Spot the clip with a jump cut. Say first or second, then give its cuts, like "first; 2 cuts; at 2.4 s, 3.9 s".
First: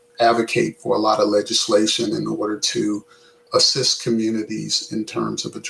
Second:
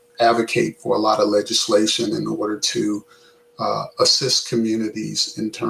first; 1 cut; at 3.5 s